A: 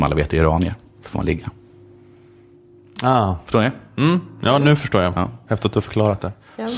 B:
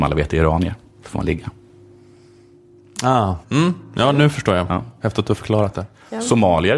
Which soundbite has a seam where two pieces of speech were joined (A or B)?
B